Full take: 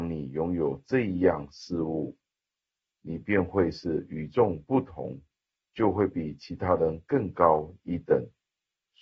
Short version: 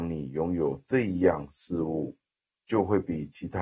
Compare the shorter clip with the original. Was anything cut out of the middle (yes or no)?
yes